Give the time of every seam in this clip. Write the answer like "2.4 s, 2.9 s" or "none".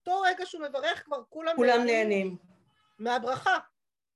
none